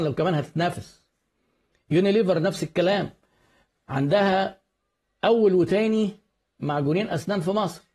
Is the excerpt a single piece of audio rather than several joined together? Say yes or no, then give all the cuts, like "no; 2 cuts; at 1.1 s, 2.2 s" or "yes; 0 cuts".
yes; 0 cuts